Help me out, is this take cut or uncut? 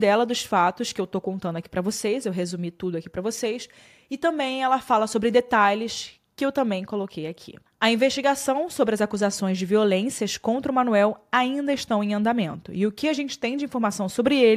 uncut